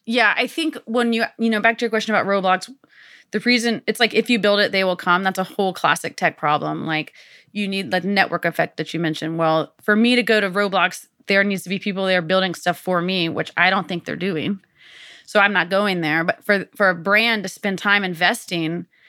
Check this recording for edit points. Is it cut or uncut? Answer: uncut